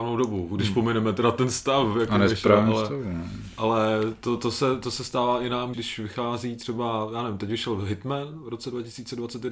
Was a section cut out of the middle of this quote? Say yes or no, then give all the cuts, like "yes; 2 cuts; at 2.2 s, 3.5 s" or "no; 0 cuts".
yes; 1 cut; at 5.7 s